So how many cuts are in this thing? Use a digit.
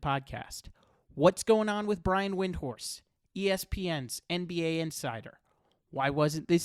0